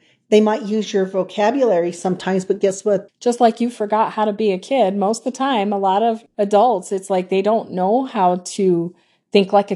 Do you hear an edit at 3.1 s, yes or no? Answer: yes